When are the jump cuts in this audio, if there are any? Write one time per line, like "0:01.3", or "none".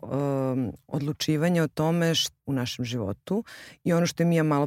0:02.4